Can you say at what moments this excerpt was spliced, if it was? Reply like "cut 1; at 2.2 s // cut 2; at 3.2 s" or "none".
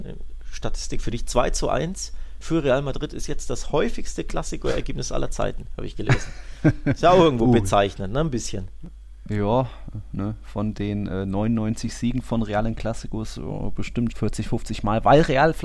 cut 1; at 14.1 s

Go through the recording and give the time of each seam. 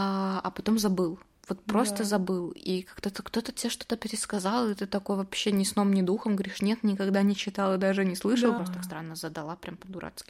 cut 1; at 8.6 s

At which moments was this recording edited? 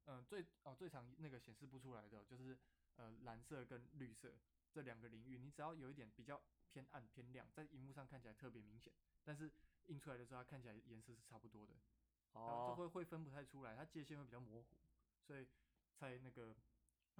none

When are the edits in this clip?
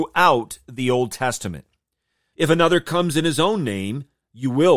cut 1; at 2.3 s

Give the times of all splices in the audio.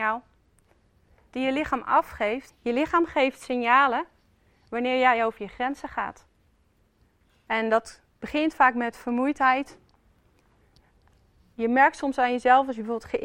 cut 1; at 2.5 s

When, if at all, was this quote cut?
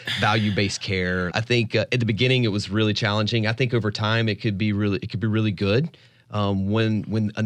cut 1; at 1.3 s

